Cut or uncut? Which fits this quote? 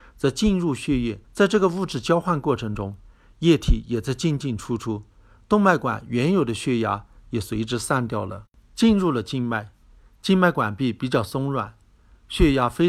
cut